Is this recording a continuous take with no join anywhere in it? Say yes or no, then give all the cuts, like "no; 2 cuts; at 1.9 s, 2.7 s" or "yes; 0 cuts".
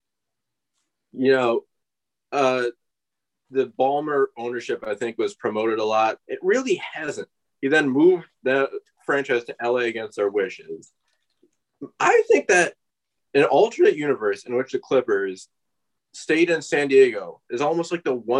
no; 2 cuts; at 6.2 s, 7.5 s